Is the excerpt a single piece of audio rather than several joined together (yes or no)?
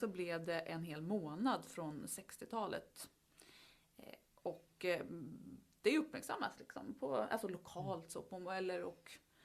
yes